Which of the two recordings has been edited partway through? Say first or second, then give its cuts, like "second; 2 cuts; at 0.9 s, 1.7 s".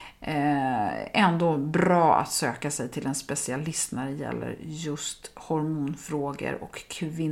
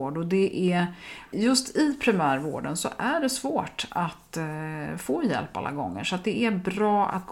second; 1 cut; at 1.3 s